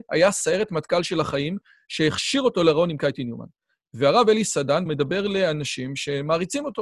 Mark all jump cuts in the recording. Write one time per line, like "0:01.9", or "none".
0:04.9